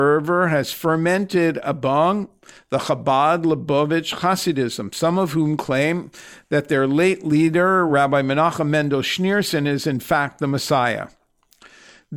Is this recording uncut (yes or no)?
yes